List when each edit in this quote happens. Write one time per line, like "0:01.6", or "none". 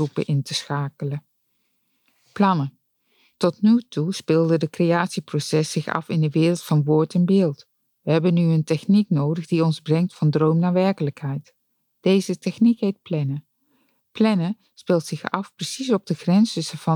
none